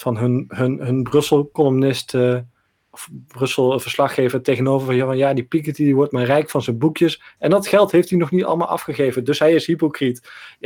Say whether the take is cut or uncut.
uncut